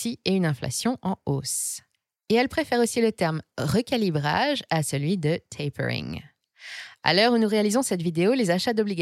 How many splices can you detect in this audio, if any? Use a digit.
0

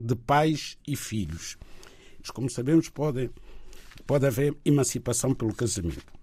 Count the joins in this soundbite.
1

